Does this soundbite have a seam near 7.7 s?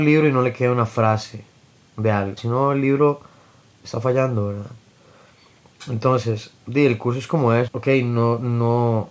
yes; 3 cuts; at 2.4 s, 6.6 s, 7.7 s

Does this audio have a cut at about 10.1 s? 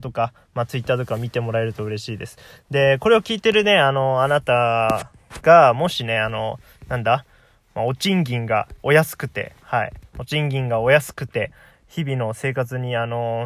no; 1 cut; at 2.6 s

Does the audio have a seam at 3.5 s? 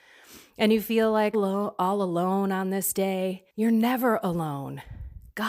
yes; 2 cuts; at 1.3 s, 3.5 s

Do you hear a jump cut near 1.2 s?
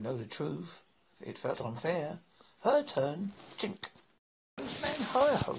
yes; 1 cut; at 1.2 s

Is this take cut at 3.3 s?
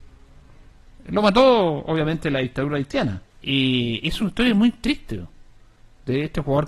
yes; 1 cut; at 3.3 s

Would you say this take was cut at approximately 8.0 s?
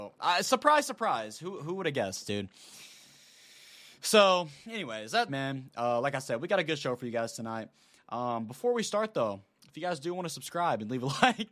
no; 1 cut; at 5.3 s

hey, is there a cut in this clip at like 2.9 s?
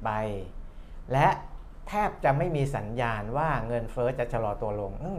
no; 0 cuts

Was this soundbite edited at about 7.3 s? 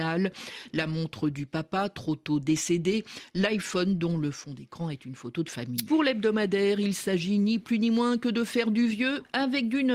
no; 1 cut; at 5.9 s

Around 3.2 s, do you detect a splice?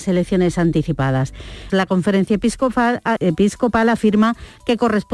yes; 2 cuts; at 1.7 s, 3.2 s

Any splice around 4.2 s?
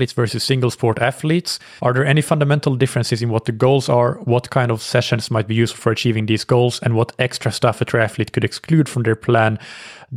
no; 1 cut; at 1.8 s

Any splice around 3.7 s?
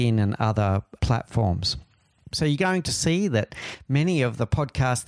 no; 1 cut; at 2.3 s

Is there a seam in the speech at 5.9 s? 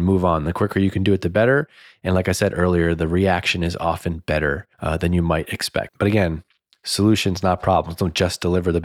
yes; 2 cuts; at 4.7 s, 5.9 s

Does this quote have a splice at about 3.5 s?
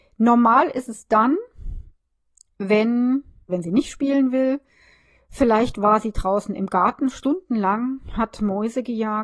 yes; 1 cut; at 3.5 s

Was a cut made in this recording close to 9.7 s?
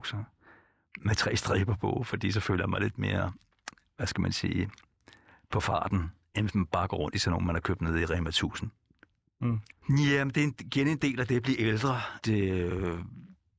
yes; 2 cuts; at 9.7 s, 12.2 s

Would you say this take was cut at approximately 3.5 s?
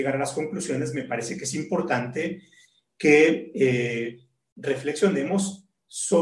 no; 0 cuts

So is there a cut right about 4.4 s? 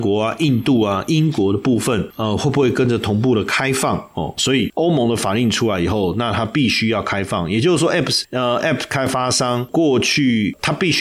yes; 1 cut; at 4.4 s

